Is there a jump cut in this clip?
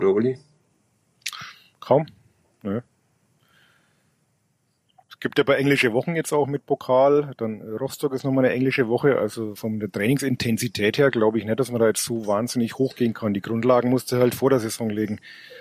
yes; 1 cut; at 9.6 s

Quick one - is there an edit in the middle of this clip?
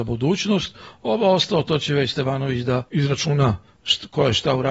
yes; 1 cut; at 2.9 s

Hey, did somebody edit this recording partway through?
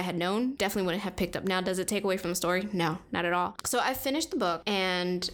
yes; 1 cut; at 3.6 s

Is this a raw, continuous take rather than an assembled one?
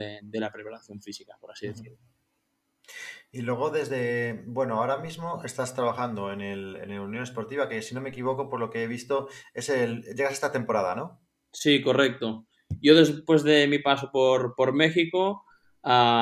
yes; 0 cuts

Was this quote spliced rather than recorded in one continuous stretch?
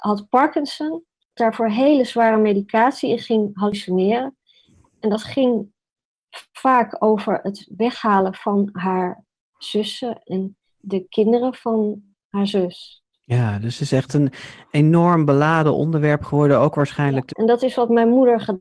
yes; 1 cut; at 17.3 s

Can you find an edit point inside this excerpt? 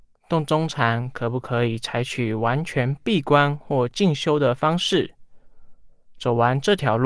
no; 0 cuts

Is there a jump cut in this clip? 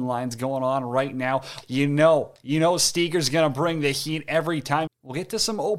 yes; 2 cuts; at 1.6 s, 4.9 s

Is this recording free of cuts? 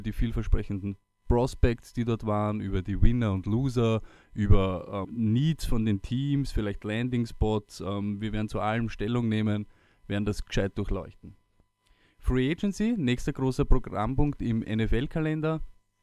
no; 1 cut; at 5.0 s

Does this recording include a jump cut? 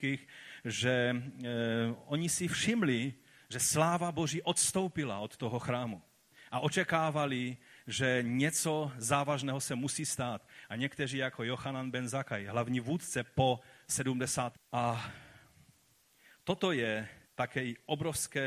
yes; 2 cuts; at 14.5 s, 17.2 s

